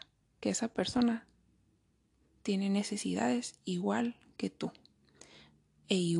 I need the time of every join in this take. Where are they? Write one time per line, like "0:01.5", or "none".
none